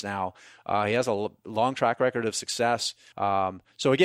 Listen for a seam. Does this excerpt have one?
yes; 1 cut; at 3.1 s

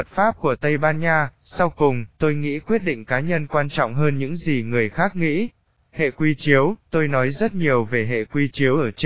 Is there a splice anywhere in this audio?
yes; 1 cut; at 5.8 s

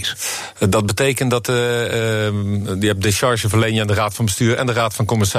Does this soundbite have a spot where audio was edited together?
no; 0 cuts

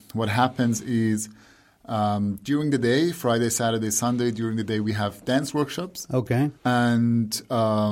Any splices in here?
yes; 1 cut; at 6.6 s

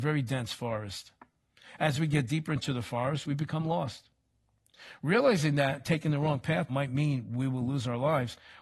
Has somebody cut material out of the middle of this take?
yes; 1 cut; at 6.7 s

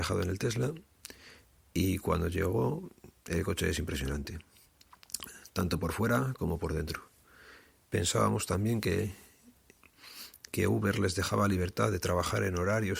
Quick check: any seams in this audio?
yes; 1 cut; at 7.8 s

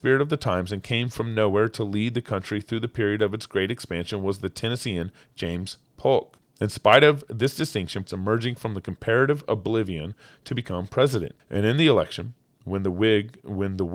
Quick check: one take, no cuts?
no; 3 cuts; at 6.4 s, 8.0 s, 11.4 s

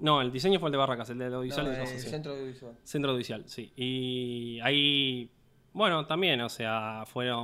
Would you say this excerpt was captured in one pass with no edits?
yes; 0 cuts

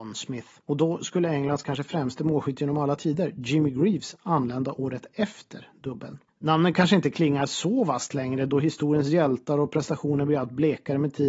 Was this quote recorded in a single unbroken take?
yes; 0 cuts

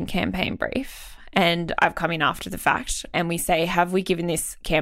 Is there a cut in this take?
yes; 1 cut; at 3.1 s

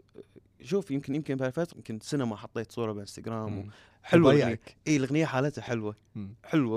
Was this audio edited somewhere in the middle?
yes; 2 cuts; at 1.7 s, 3.9 s

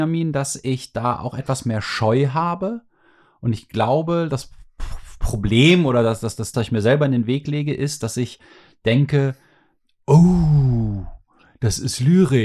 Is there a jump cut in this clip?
yes; 1 cut; at 6.5 s

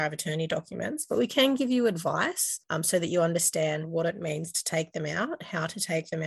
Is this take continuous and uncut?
yes; 0 cuts

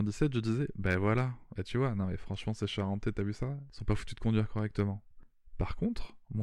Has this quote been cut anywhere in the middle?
no; 0 cuts

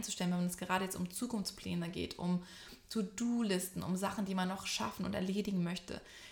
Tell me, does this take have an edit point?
no; 0 cuts

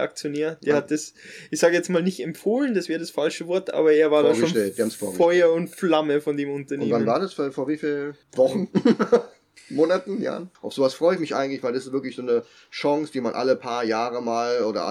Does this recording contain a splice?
yes; 2 cuts; at 8.2 s, 10.5 s

